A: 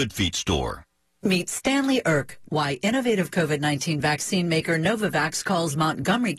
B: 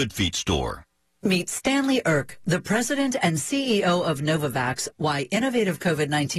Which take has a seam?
A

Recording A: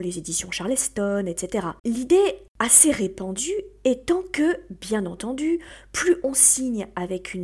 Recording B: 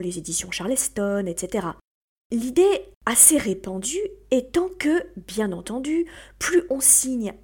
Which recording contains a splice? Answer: A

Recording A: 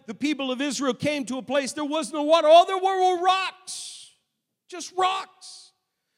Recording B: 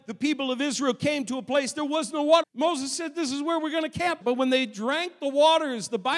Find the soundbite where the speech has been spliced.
B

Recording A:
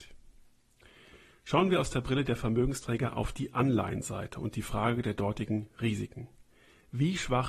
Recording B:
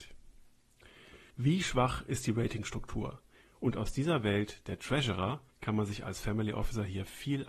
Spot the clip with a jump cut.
B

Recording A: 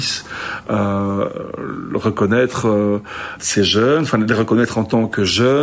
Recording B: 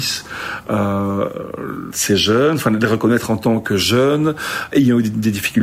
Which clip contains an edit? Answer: B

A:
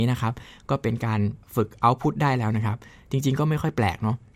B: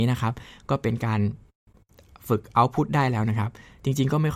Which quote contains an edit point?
A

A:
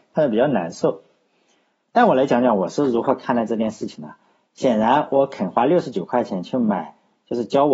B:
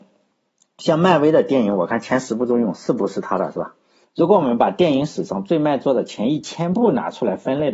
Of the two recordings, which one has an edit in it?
B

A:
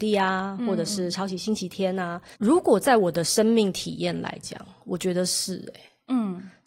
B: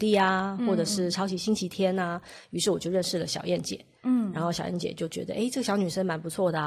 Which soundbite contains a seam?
A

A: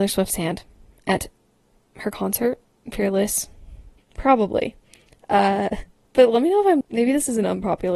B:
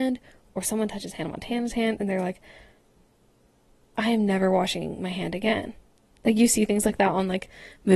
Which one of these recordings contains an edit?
A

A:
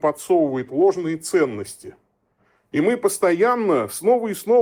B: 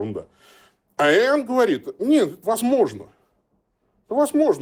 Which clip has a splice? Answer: B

